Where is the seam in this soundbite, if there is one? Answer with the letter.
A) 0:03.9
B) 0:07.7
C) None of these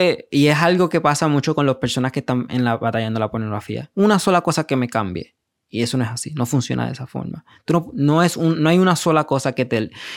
A